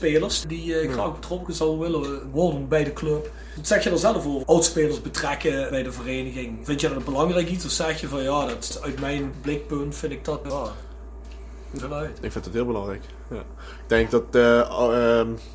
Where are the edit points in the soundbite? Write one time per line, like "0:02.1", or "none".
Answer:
0:04.4
0:11.8